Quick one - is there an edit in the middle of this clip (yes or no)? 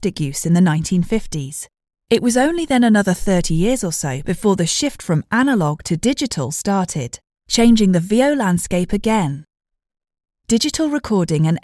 yes